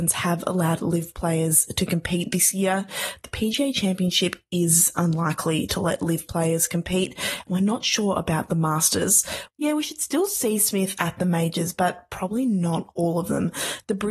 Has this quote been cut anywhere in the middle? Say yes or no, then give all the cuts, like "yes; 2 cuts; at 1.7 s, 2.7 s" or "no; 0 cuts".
yes; 1 cut; at 9.5 s